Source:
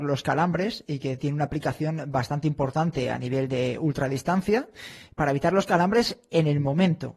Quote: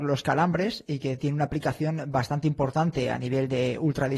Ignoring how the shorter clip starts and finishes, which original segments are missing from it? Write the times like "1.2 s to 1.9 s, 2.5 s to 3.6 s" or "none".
none